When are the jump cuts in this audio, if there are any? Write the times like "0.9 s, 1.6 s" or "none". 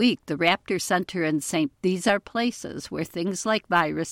1.7 s